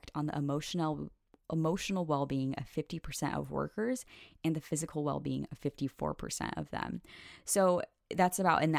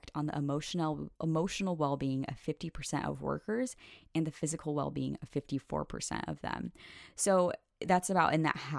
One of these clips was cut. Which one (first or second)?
second